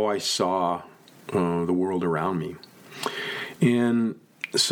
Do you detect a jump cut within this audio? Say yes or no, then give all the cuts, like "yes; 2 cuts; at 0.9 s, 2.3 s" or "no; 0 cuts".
no; 0 cuts